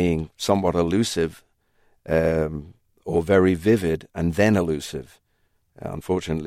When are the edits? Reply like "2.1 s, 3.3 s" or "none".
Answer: none